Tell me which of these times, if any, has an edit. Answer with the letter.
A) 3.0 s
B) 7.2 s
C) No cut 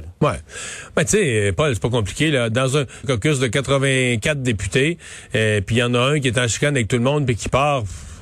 A